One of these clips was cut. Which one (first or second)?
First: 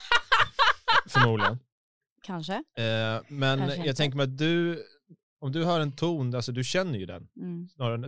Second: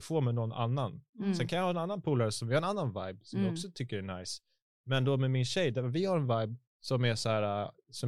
second